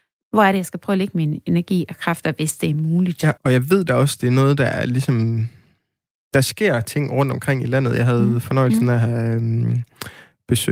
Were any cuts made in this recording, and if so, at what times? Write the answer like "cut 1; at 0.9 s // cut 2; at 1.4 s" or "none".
cut 1; at 3.4 s